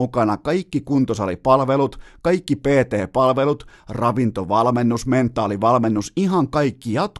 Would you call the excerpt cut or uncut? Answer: uncut